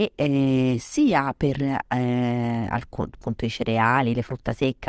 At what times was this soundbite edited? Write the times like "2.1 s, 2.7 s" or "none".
none

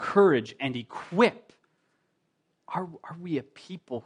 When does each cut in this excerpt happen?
2.5 s

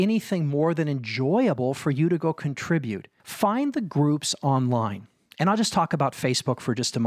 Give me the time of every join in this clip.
3.2 s

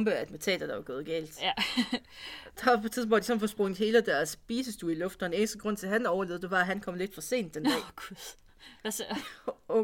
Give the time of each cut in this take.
none

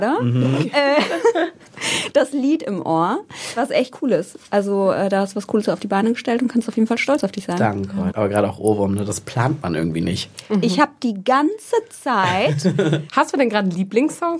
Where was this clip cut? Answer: 8.1 s, 10.5 s, 13.1 s

